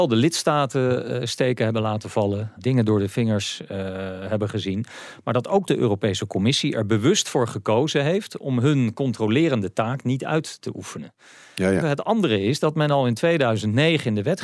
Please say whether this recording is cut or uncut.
cut